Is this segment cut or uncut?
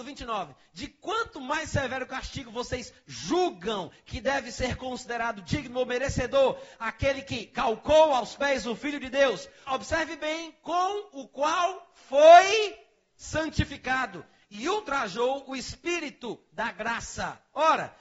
cut